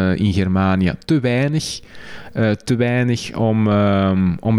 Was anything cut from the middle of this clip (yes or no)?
no